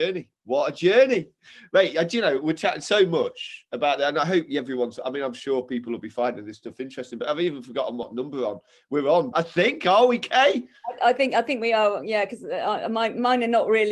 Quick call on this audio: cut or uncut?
cut